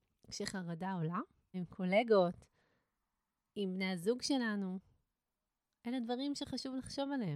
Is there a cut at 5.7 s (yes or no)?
no